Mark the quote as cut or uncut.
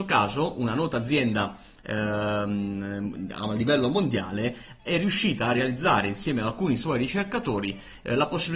uncut